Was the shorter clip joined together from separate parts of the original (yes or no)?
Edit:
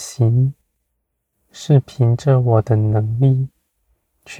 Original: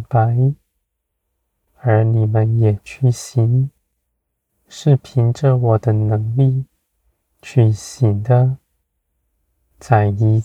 no